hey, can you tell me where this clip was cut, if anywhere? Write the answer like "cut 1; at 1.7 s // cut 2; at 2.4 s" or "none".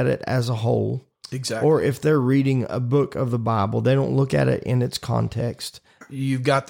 none